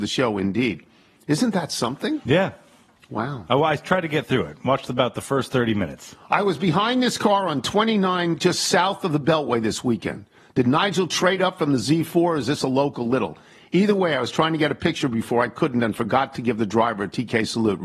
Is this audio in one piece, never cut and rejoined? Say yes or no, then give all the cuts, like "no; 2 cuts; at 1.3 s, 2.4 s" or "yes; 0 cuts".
yes; 0 cuts